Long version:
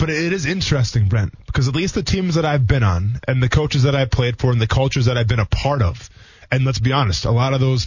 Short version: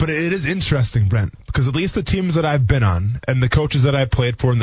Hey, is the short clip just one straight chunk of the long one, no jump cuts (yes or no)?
yes